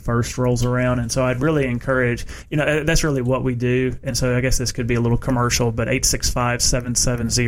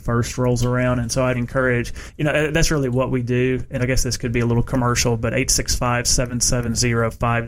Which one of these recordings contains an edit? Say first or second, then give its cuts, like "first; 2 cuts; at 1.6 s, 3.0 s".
second; 2 cuts; at 1.3 s, 3.8 s